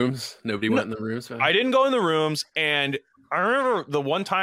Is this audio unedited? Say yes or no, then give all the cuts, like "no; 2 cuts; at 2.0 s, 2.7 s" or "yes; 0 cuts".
yes; 0 cuts